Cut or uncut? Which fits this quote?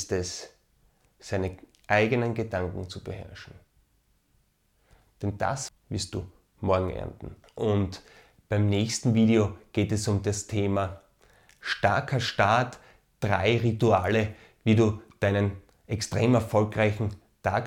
cut